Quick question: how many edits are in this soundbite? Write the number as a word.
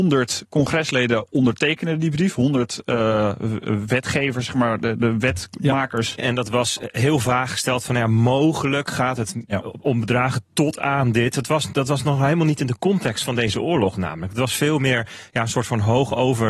one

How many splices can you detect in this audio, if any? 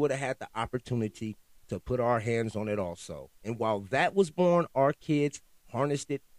one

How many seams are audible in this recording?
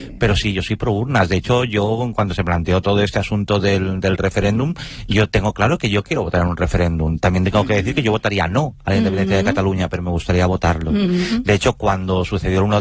zero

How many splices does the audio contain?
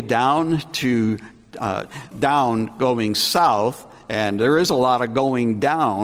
one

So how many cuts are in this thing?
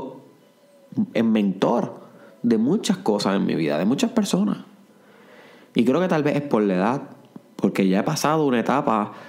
one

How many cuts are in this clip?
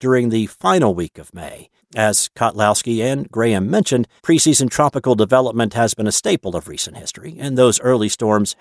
two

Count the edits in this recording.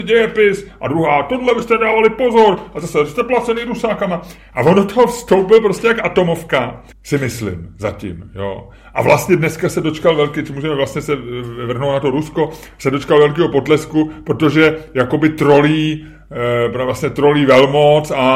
one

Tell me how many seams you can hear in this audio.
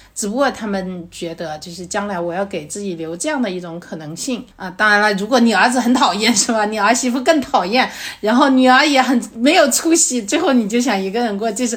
one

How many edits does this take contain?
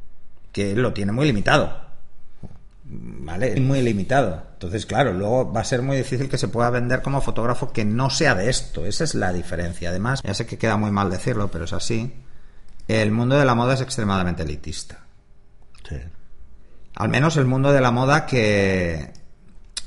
two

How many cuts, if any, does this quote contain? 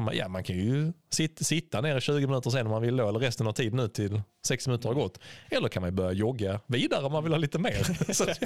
zero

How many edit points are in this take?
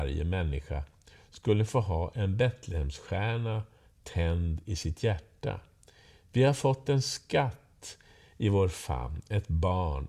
zero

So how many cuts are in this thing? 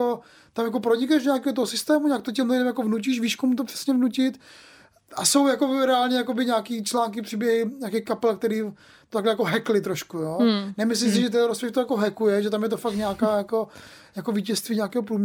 zero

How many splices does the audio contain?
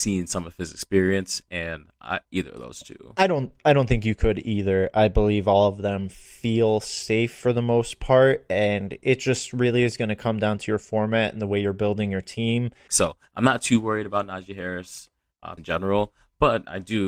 three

